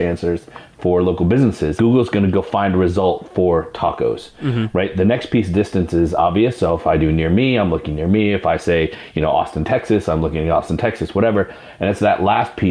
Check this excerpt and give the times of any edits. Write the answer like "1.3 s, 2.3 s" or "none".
1.8 s